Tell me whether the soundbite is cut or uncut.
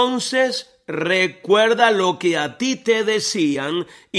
uncut